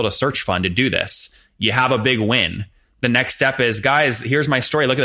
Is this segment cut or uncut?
uncut